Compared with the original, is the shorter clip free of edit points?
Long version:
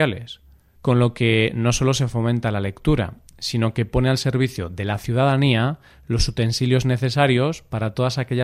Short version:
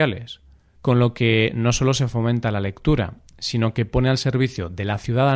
yes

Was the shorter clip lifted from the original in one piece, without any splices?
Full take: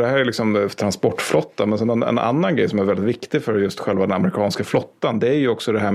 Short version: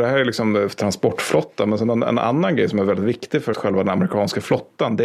no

